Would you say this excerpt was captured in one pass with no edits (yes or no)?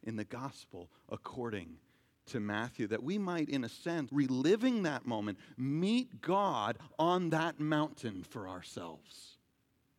no